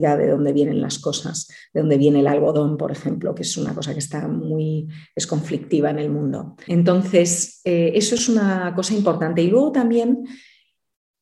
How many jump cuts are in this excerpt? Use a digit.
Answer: 1